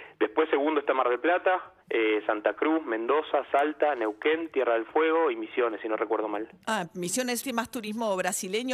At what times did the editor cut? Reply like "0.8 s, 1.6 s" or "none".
1.8 s, 7.4 s